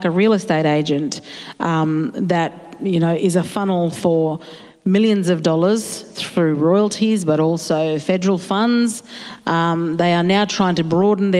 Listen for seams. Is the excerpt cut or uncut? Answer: uncut